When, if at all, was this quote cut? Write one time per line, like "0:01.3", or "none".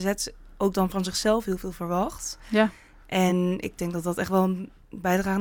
none